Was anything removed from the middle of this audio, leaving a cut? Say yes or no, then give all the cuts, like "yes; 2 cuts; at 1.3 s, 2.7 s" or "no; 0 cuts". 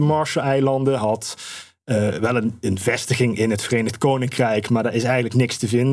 no; 0 cuts